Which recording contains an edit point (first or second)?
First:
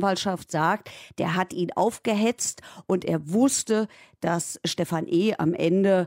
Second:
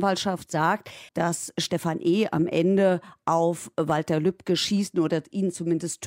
second